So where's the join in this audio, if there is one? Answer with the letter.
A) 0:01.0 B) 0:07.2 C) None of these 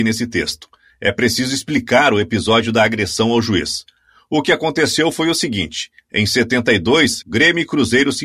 B